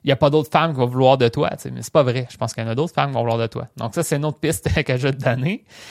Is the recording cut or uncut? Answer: uncut